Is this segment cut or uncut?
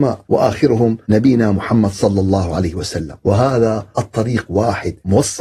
uncut